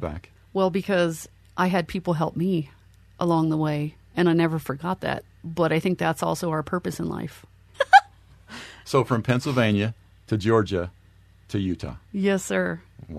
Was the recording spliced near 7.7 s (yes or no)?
yes